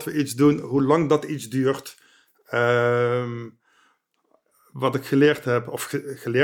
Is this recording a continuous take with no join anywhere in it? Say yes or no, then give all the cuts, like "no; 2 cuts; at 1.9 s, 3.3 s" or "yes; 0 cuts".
yes; 0 cuts